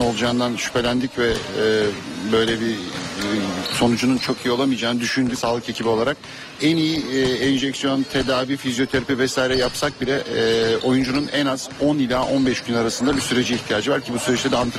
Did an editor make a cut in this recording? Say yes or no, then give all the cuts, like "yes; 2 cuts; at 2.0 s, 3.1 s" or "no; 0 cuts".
no; 0 cuts